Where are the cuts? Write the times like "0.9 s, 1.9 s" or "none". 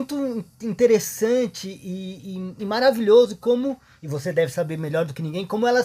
none